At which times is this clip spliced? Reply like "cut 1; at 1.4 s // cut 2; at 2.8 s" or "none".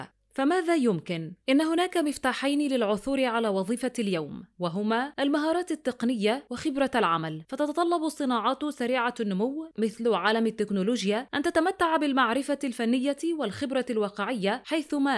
cut 1; at 1.4 s